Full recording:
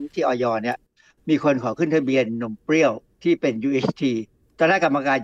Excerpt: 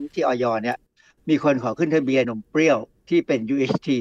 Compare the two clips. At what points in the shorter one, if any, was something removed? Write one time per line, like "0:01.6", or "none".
0:02.2